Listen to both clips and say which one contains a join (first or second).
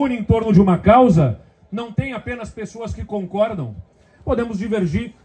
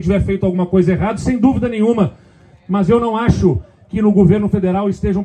first